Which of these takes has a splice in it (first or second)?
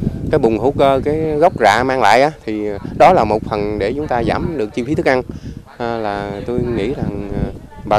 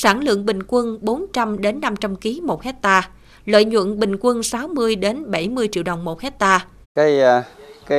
second